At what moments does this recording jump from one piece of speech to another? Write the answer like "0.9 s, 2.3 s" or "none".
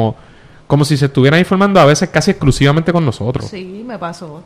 3.4 s